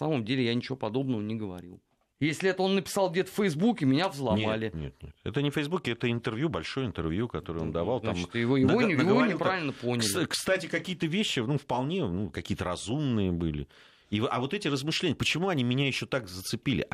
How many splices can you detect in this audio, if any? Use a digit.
1